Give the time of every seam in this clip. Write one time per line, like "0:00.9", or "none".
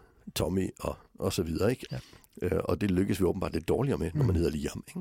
0:01.9

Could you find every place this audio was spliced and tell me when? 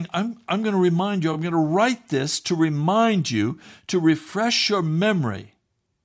none

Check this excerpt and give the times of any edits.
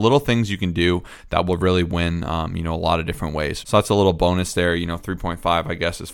0:03.6

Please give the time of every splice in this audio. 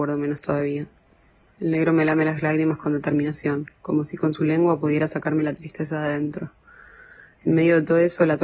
0:01.5

